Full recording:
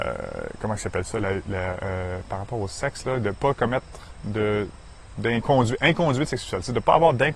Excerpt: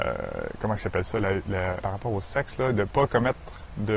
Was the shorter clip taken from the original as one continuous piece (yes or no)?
no